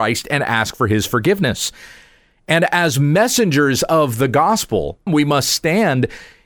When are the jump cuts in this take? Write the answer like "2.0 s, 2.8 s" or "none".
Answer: 5.1 s